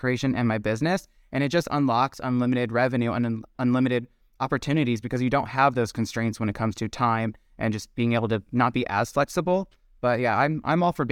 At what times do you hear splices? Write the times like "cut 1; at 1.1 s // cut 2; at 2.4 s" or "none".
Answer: none